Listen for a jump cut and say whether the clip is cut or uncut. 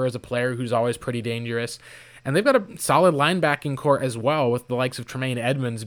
uncut